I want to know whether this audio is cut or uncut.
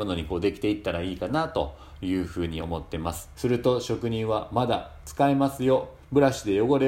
cut